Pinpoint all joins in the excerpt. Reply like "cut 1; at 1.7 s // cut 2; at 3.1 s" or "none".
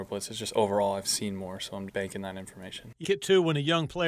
cut 1; at 1.9 s // cut 2; at 3.0 s

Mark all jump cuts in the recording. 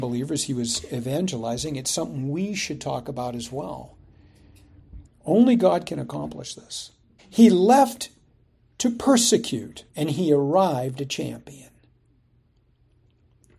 cut 1; at 5.1 s // cut 2; at 7.2 s // cut 3; at 9.9 s

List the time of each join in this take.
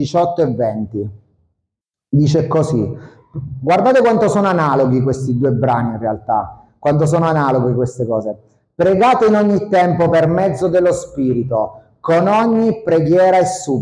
none

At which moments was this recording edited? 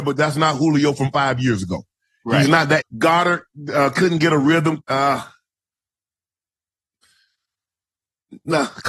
cut 1; at 2.8 s // cut 2; at 4.8 s

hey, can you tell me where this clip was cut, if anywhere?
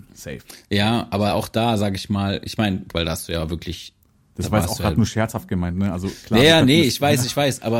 cut 1; at 2.9 s

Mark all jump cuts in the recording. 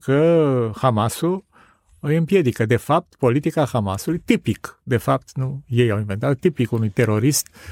none

